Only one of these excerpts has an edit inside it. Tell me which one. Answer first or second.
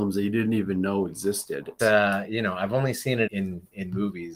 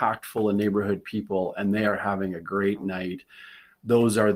first